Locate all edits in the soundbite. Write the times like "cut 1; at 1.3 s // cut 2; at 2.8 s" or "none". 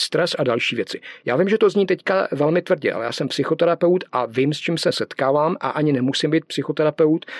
none